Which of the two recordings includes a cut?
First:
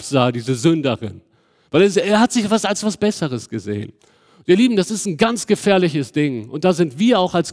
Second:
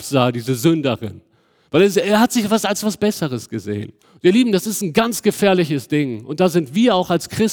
second; 1 cut; at 4.0 s

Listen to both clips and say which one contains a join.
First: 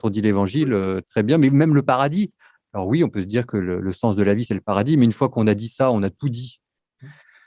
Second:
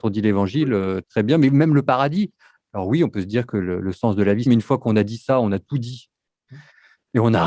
second; 1 cut; at 4.5 s

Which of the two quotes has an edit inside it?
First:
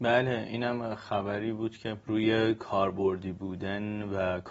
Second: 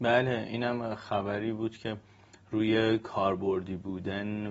first; 1 cut; at 2.0 s

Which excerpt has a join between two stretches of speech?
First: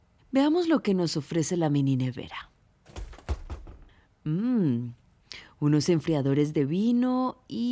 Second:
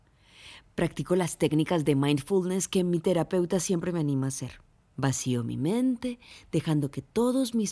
second; 1 cut; at 4.9 s

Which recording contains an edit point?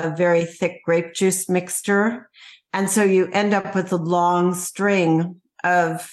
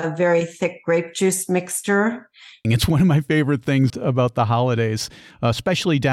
second; 2 cuts; at 2.6 s, 3.9 s

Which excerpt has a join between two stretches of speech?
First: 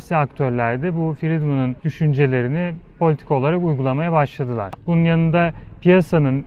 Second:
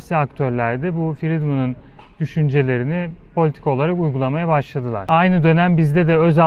first; 2 cuts; at 1.8 s, 4.7 s

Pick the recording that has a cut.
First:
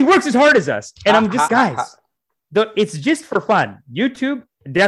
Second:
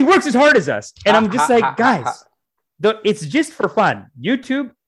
first; 1 cut; at 1.5 s

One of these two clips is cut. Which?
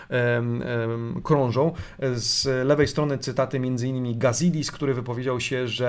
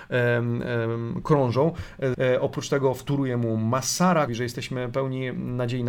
second; 2 cuts; at 2.1 s, 4.3 s

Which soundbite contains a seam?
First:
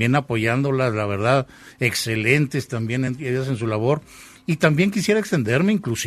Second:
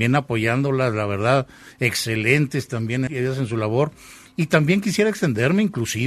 second; 1 cut; at 3.1 s

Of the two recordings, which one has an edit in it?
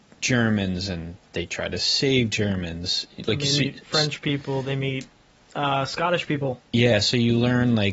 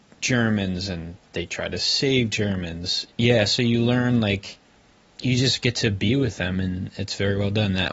second; 1 cut; at 3.1 s

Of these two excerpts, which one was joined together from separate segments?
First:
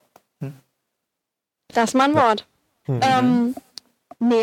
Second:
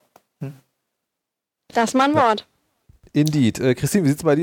first; 1 cut; at 2.8 s

